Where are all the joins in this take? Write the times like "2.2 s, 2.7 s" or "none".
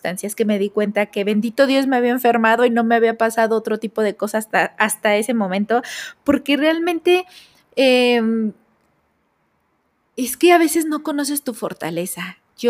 none